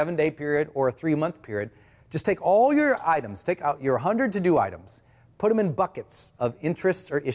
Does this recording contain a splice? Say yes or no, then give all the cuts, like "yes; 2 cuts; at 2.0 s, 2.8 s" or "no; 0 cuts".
no; 0 cuts